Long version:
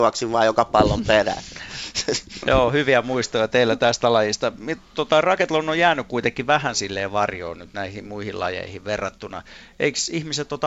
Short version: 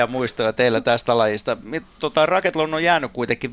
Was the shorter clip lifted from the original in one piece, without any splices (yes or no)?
yes